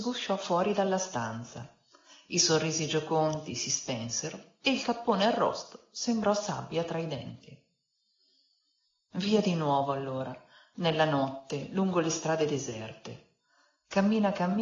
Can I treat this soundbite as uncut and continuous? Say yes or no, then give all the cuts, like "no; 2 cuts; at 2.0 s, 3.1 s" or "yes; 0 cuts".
yes; 0 cuts